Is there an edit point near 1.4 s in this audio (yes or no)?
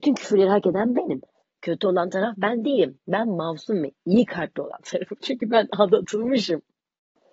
yes